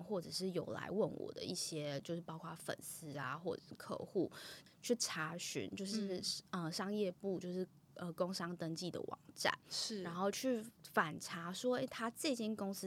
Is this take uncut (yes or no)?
yes